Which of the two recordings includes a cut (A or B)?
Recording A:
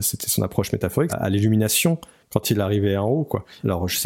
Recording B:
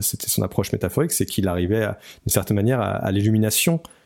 A